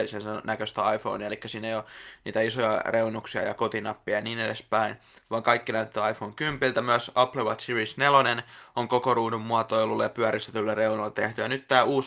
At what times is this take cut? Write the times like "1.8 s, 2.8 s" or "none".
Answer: none